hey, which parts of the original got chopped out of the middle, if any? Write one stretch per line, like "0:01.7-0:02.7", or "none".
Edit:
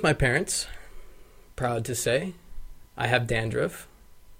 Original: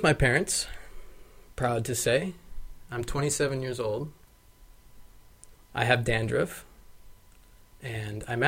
0:02.8-0:05.6